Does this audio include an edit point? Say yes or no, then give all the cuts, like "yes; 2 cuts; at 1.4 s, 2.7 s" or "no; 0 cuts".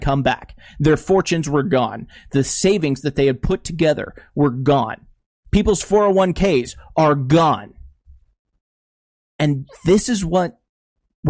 no; 0 cuts